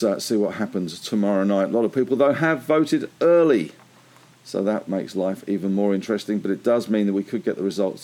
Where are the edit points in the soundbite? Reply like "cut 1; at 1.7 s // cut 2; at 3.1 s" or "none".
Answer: none